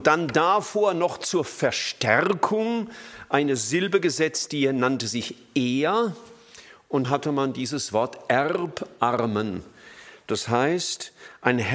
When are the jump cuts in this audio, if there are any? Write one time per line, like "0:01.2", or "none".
0:07.0